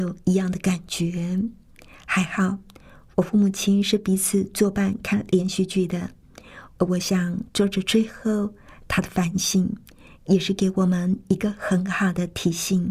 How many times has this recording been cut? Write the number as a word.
one